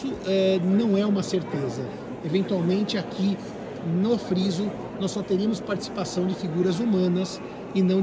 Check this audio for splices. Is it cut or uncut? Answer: uncut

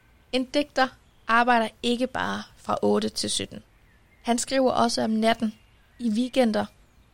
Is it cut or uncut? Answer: uncut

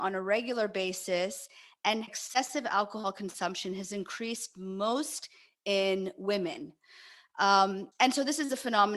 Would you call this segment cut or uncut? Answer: uncut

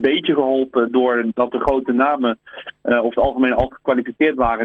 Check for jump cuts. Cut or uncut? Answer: uncut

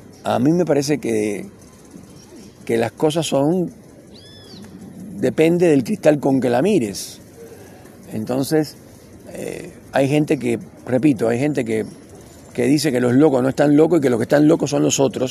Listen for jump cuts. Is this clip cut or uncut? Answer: uncut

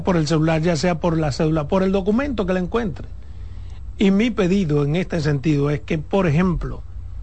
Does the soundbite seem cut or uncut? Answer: uncut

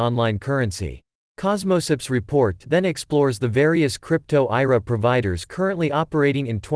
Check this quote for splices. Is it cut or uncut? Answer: cut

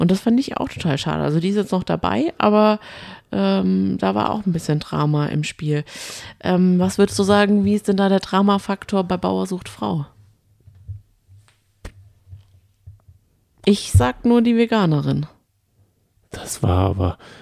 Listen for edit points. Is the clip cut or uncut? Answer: uncut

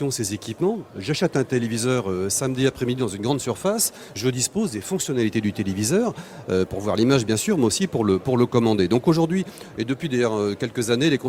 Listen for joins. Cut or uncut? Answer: uncut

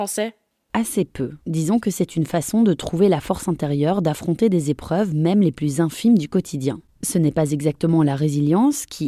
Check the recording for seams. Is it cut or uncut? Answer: cut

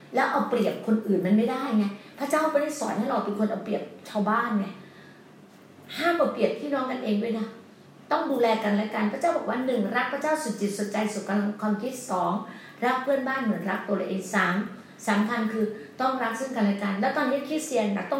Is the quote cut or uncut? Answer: uncut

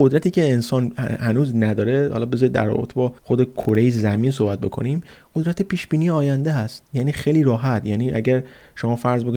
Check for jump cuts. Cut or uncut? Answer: cut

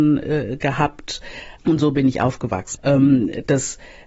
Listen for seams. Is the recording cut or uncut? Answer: cut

